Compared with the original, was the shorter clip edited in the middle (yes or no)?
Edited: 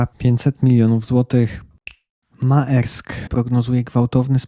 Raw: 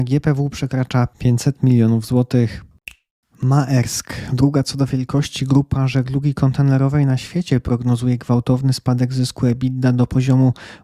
yes